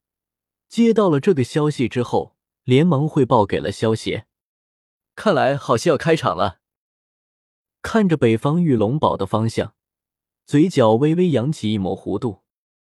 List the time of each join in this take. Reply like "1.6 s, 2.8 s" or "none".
7.7 s